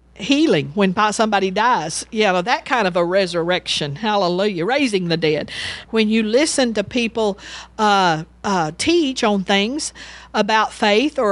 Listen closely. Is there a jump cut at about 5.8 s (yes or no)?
yes